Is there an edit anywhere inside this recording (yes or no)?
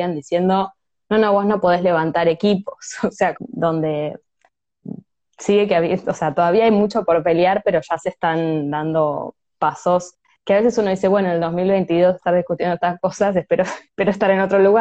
yes